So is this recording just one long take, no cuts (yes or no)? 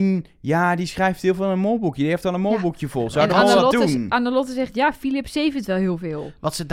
yes